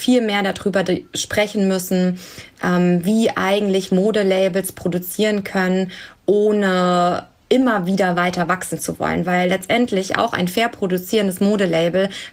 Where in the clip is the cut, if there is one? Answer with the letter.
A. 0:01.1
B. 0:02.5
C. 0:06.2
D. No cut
D